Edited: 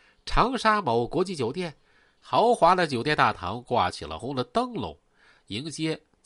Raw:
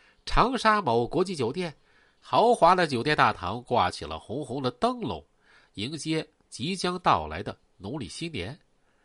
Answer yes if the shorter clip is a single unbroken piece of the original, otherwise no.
no